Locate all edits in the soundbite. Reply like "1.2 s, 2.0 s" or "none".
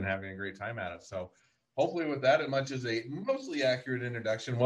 none